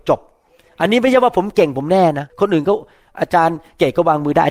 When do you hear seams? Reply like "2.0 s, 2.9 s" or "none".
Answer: 2.3 s